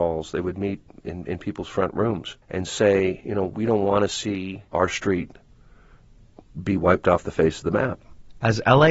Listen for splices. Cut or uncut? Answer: cut